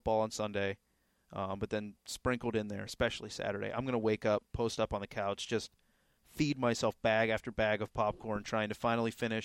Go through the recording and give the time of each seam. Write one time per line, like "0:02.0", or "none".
none